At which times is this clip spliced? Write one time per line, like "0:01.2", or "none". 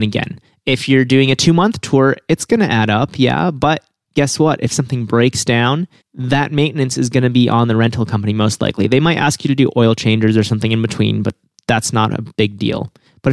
none